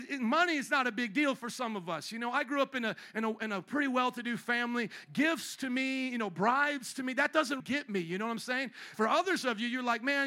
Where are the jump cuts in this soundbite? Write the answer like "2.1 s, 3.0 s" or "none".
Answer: 7.6 s, 8.9 s